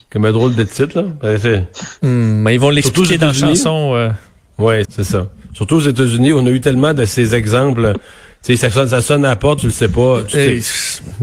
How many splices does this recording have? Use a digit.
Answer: 2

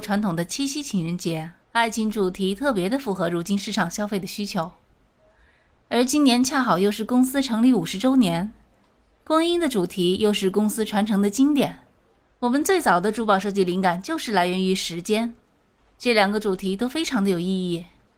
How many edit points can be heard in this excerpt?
1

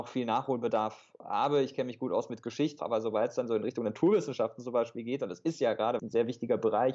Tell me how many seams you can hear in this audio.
2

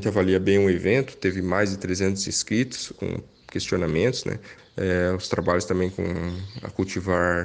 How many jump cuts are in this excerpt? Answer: 2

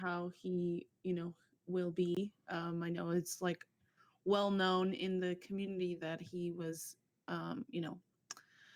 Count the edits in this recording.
0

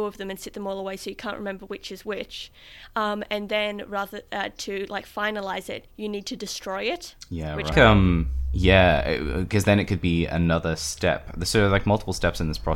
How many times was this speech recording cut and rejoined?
1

